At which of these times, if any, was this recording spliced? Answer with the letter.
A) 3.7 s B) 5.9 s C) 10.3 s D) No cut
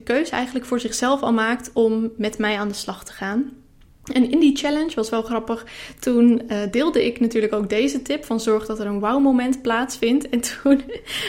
D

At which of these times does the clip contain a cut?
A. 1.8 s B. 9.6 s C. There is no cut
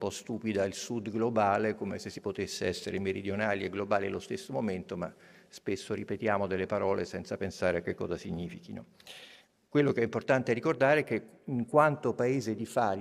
C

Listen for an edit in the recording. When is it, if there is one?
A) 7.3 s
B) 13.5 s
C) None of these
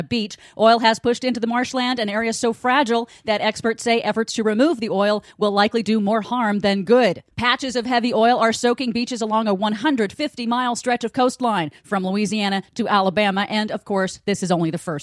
A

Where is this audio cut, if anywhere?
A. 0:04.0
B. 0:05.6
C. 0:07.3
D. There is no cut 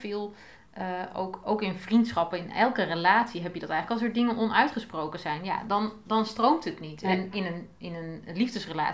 C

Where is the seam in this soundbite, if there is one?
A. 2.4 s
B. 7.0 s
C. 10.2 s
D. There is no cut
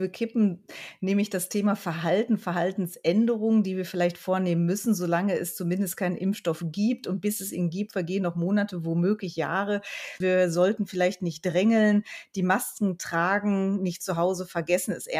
C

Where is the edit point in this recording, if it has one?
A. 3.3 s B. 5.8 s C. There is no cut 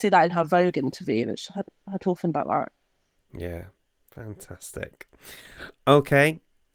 C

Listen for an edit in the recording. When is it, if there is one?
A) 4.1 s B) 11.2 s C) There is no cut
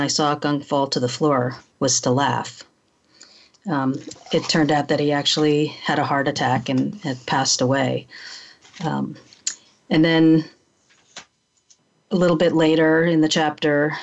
A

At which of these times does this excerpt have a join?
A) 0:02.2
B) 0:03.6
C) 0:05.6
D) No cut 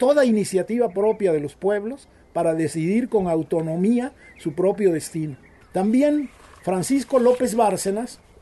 C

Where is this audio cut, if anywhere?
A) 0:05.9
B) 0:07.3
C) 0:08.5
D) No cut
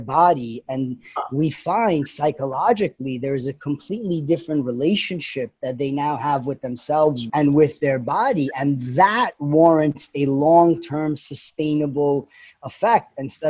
B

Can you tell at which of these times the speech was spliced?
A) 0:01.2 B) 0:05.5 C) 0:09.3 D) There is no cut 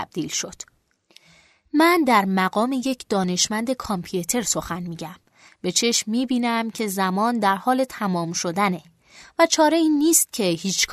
B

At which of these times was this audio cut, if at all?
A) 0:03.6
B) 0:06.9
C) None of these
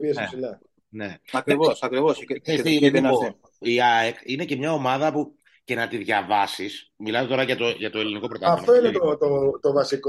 A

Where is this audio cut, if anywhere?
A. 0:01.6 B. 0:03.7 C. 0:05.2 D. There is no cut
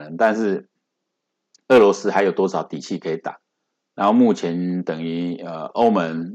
D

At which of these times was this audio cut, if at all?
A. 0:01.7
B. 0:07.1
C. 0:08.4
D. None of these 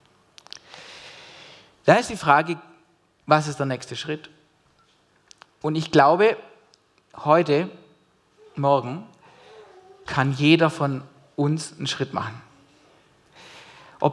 D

